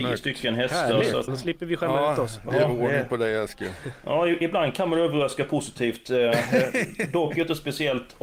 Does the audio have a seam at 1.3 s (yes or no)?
yes